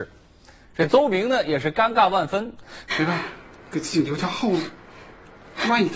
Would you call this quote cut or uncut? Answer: cut